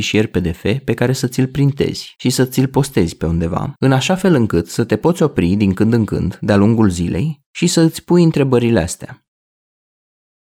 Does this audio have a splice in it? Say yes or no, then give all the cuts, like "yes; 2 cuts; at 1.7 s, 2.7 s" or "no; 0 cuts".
no; 0 cuts